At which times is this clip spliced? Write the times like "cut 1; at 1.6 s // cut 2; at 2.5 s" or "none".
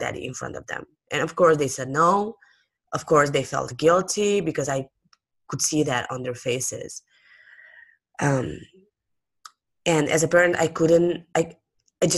none